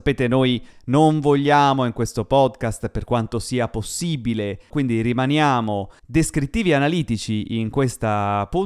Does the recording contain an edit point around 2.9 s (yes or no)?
no